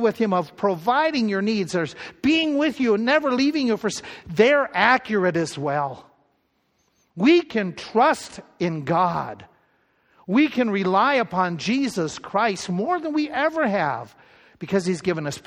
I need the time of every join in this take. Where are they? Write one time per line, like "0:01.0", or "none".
none